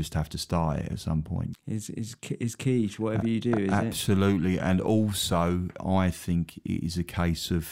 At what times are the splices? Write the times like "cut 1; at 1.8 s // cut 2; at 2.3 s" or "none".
cut 1; at 1.5 s // cut 2; at 5.8 s